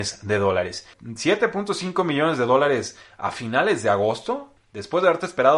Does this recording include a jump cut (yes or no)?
yes